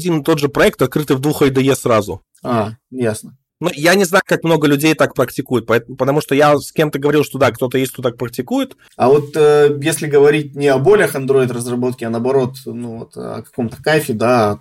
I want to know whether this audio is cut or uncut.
cut